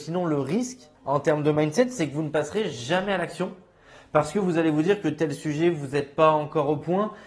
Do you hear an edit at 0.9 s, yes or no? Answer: yes